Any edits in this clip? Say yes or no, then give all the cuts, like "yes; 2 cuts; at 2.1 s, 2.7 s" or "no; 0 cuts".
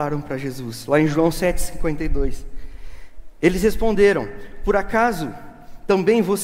no; 0 cuts